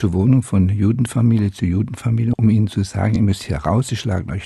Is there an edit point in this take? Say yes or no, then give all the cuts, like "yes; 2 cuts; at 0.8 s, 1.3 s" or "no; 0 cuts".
no; 0 cuts